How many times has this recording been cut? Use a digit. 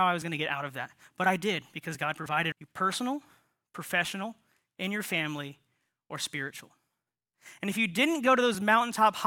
1